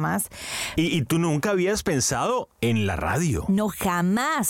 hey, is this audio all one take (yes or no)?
no